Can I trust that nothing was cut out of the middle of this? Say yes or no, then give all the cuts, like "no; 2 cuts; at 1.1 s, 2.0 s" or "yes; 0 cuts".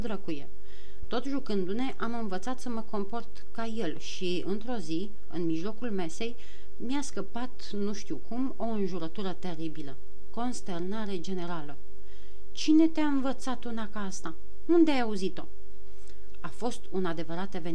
yes; 0 cuts